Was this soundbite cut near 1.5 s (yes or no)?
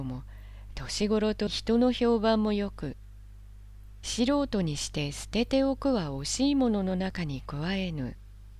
yes